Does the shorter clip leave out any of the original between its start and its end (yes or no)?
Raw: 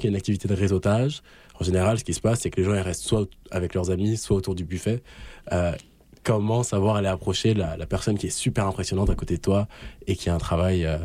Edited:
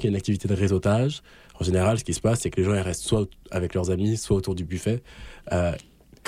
no